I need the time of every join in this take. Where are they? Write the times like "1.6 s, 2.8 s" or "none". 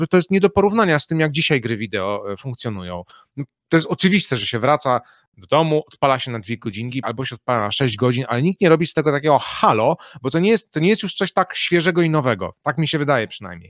7.0 s